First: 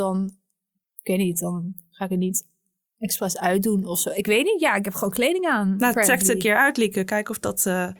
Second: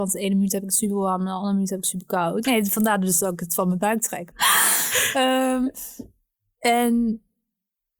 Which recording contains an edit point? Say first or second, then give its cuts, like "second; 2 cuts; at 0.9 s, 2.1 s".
second; 2 cuts; at 2.4 s, 4.3 s